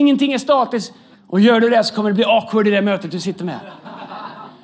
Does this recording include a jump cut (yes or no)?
yes